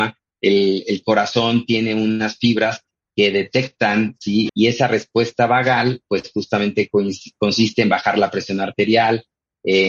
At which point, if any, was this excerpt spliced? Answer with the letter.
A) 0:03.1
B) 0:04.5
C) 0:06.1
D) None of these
B